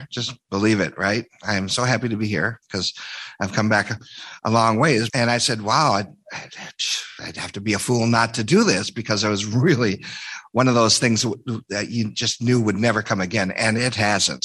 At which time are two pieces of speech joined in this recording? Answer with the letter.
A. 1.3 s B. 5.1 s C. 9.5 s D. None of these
B